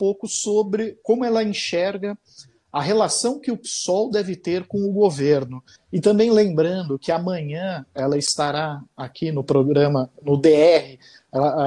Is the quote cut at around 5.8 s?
yes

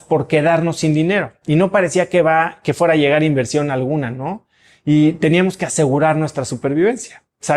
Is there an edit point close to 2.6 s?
no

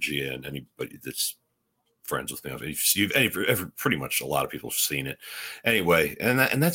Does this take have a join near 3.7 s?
no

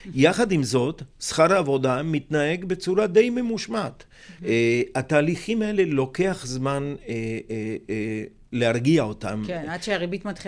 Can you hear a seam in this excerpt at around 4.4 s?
yes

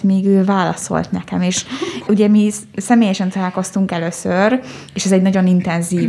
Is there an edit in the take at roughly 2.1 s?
yes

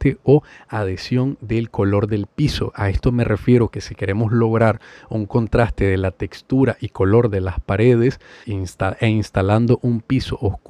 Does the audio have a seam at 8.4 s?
yes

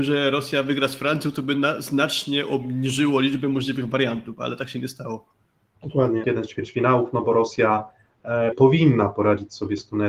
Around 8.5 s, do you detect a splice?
yes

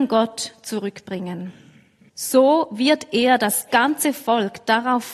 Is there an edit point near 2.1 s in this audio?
yes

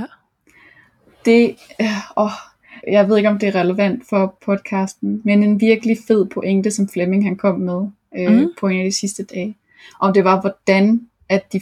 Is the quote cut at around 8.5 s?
no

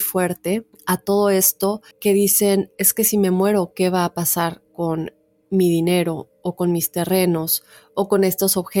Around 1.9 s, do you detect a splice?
yes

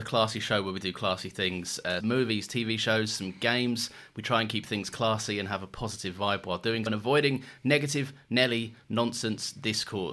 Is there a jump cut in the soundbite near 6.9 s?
yes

